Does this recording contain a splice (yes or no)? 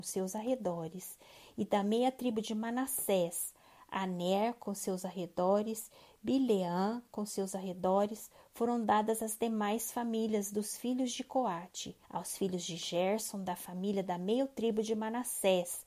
yes